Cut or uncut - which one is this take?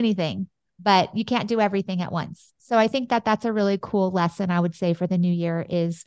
uncut